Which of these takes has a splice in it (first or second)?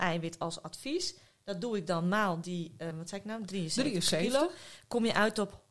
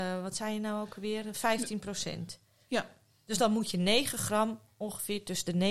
first